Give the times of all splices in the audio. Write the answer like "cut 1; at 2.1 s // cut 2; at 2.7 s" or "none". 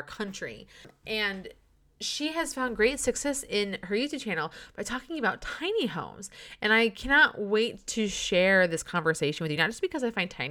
none

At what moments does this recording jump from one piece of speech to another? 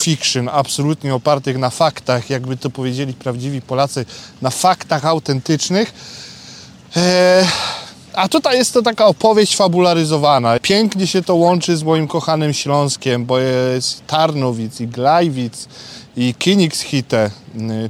cut 1; at 10.6 s

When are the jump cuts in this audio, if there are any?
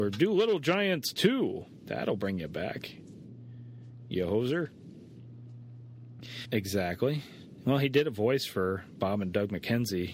cut 1; at 6.4 s

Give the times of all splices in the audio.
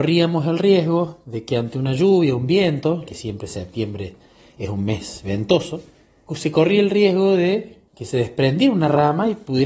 cut 1; at 3.1 s // cut 2; at 6.3 s // cut 3; at 7.9 s

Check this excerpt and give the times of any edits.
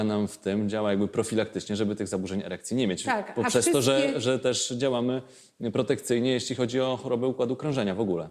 none

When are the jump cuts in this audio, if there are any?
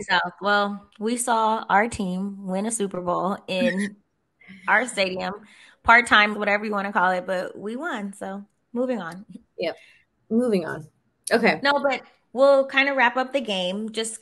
cut 1; at 6.3 s

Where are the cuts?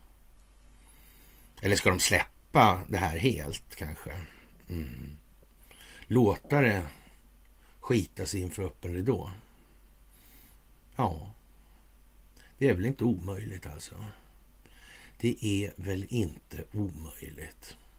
cut 1; at 1.5 s

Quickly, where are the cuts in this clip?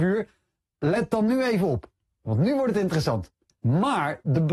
cut 1; at 3.6 s

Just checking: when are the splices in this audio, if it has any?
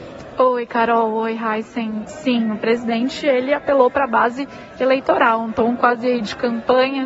cut 1; at 2.1 s

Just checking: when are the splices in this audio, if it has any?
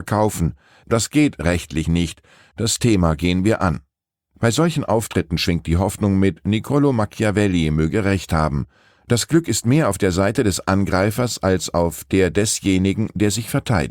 none

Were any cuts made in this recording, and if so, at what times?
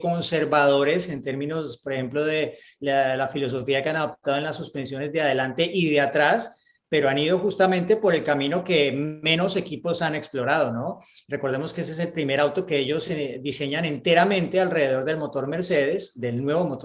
none

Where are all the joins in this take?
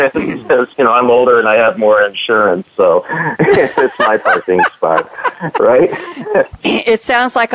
cut 1; at 6.6 s

